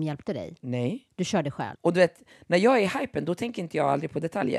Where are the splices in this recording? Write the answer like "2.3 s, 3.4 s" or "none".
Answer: 1.8 s